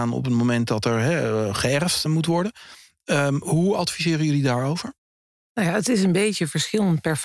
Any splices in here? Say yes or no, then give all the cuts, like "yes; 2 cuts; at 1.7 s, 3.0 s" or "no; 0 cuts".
yes; 1 cut; at 2.1 s